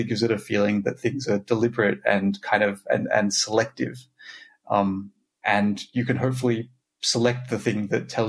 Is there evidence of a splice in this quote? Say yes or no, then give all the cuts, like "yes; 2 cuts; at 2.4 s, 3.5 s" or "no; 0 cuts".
no; 0 cuts